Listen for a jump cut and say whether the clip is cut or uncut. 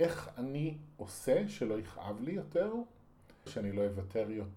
cut